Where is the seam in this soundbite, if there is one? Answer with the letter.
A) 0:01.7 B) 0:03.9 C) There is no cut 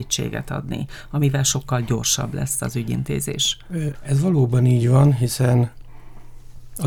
B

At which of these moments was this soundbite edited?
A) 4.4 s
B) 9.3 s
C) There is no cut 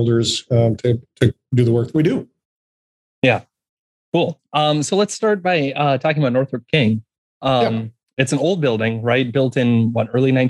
C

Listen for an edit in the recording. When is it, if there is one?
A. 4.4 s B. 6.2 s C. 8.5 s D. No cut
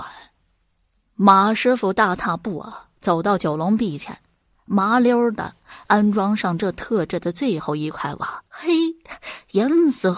C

